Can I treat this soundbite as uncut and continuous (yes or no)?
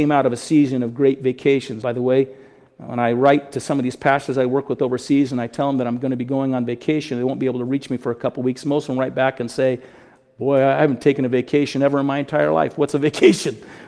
no